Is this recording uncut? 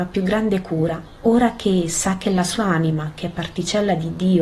yes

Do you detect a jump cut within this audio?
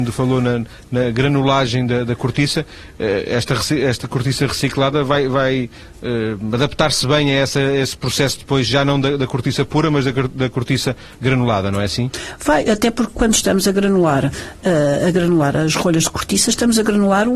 no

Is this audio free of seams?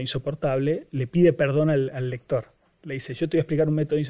yes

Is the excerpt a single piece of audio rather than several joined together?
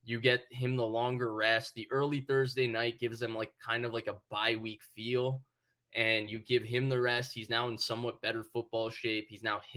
yes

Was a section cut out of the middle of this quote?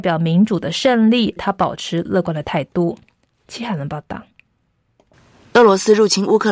yes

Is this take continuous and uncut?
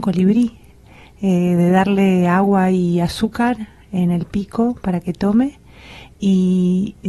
yes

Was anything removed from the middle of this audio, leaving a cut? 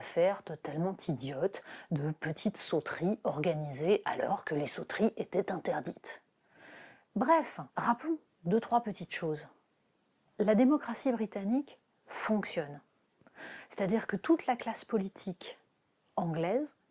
yes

